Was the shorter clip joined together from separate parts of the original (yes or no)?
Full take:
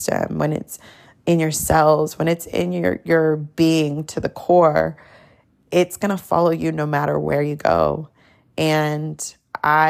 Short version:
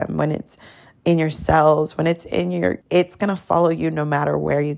yes